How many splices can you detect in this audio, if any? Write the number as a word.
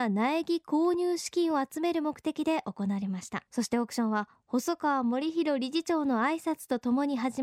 one